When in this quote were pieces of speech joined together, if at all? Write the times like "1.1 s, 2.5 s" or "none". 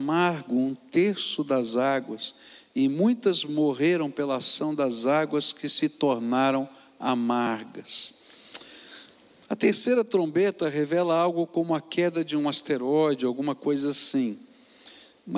none